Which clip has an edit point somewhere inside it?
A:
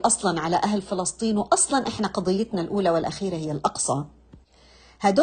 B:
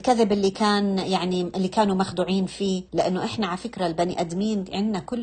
B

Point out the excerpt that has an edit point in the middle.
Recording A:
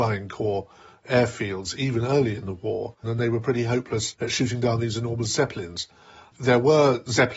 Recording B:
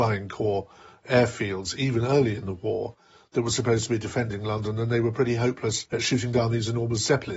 A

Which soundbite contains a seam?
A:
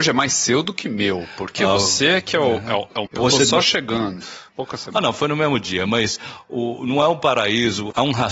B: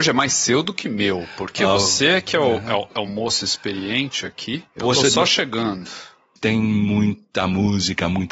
A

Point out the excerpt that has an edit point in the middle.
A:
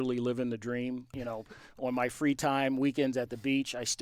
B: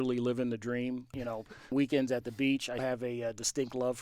B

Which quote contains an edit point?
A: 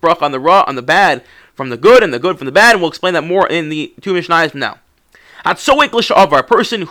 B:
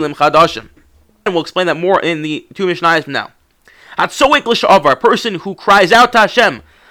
B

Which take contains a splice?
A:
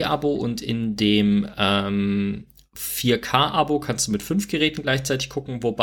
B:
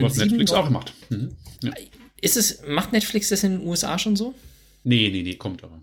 B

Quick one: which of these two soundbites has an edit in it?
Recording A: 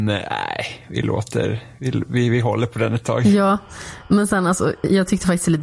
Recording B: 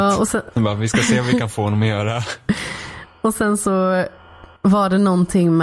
B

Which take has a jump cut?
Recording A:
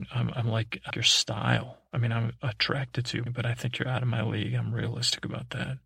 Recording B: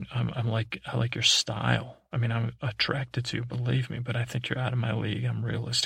A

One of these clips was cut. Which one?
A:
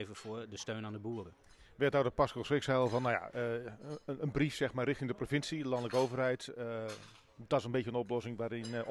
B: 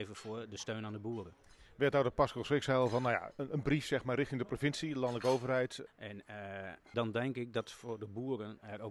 B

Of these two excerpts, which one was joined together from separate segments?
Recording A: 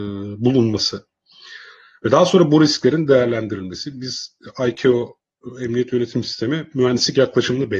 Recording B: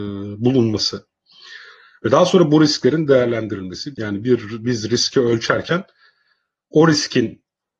B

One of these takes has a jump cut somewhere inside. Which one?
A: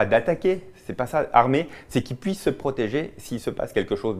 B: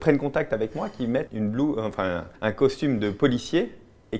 B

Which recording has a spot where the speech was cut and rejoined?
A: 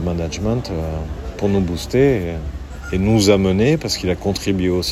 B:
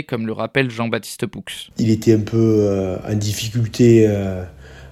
B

